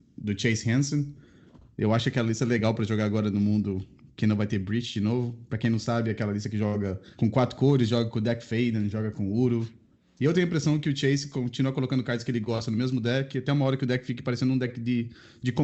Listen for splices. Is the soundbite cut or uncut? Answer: uncut